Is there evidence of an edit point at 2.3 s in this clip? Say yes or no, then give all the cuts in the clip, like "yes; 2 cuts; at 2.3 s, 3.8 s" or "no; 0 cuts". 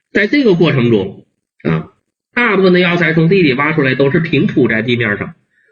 yes; 1 cut; at 2.3 s